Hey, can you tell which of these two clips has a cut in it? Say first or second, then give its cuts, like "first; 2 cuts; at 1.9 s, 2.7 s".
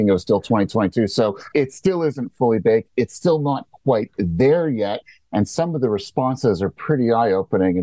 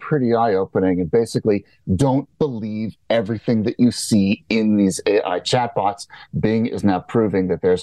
first; 1 cut; at 1.5 s